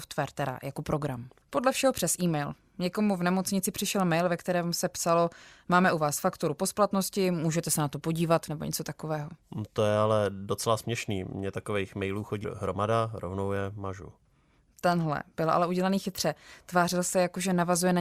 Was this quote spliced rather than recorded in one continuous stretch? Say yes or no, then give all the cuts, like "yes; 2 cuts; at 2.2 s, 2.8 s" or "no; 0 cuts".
yes; 1 cut; at 1.4 s